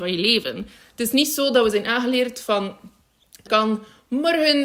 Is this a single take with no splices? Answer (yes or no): no